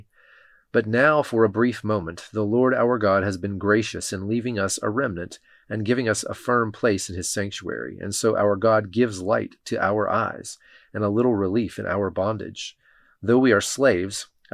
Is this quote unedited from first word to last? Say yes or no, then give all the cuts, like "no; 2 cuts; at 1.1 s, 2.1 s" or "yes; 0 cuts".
yes; 0 cuts